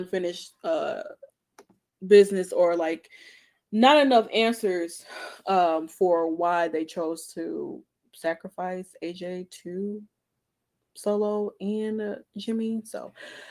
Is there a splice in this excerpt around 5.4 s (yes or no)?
no